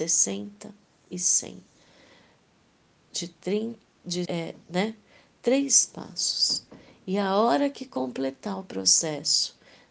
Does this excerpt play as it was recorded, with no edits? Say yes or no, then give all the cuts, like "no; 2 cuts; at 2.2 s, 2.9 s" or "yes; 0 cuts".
no; 1 cut; at 4.2 s